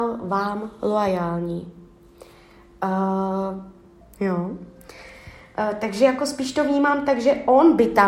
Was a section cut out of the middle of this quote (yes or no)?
yes